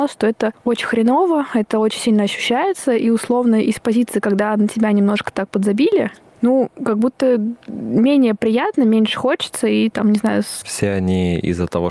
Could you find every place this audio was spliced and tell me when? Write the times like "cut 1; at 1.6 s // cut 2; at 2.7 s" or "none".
cut 1; at 10.6 s